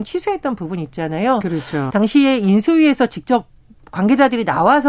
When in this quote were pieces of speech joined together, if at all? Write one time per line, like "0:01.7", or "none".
0:01.9